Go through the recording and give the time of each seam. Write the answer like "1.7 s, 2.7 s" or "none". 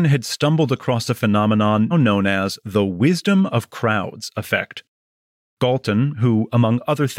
1.9 s, 5.5 s